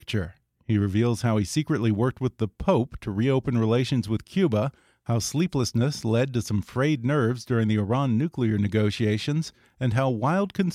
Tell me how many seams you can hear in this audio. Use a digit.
0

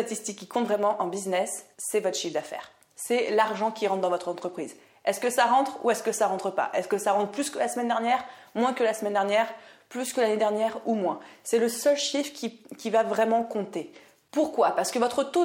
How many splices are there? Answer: 1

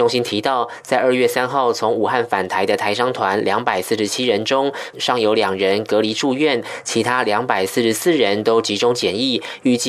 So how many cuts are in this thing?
1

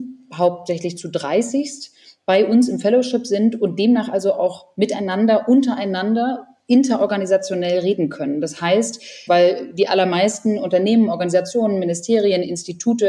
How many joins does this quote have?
1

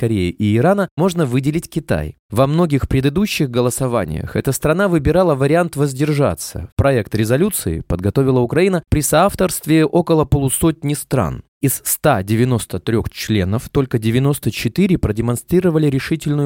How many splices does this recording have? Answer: 1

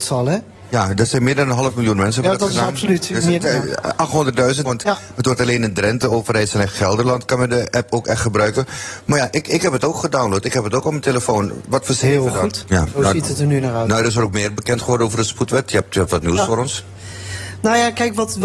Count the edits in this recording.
2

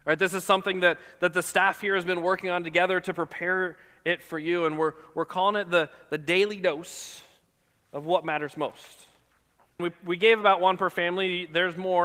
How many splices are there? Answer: 1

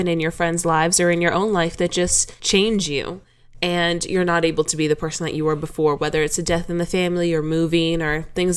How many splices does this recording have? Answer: 0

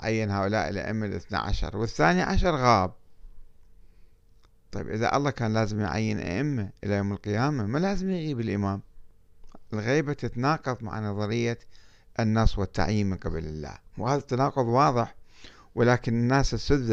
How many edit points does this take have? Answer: 1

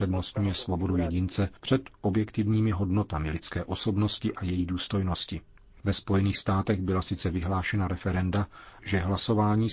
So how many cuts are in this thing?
3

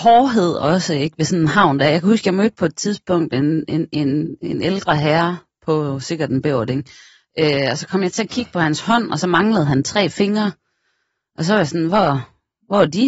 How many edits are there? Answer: 0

